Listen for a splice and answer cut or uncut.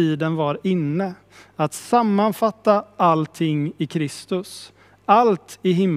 uncut